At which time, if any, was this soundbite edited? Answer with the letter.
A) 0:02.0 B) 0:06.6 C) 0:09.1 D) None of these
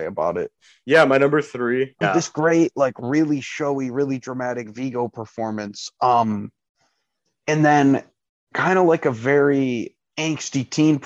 A